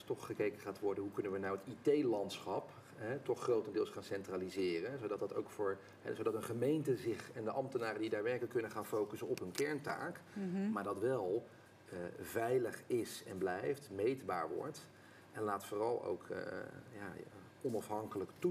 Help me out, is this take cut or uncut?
uncut